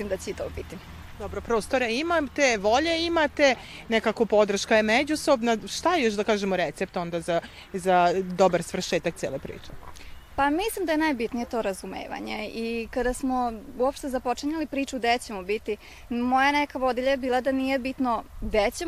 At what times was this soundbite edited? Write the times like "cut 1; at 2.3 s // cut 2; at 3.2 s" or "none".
none